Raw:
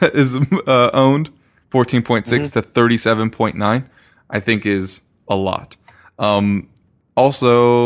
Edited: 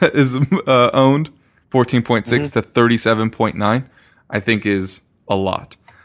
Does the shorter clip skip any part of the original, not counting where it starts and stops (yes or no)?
no